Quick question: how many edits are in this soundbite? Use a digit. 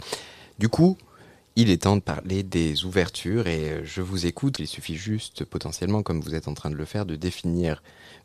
1